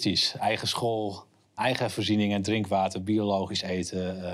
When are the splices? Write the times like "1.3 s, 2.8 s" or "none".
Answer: 1.6 s

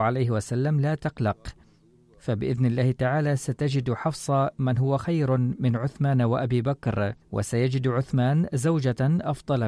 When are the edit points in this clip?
7.2 s

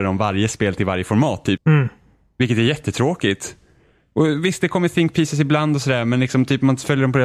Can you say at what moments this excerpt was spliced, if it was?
1.6 s

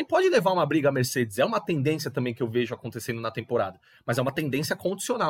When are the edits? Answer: none

